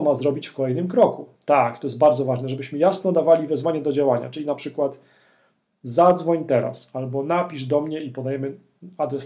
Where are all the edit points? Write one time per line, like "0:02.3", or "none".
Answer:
none